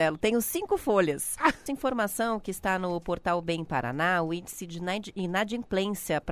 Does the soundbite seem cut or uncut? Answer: cut